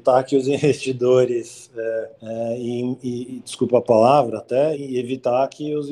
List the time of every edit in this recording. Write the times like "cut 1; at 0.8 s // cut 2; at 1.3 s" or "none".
cut 1; at 2.2 s // cut 2; at 4.7 s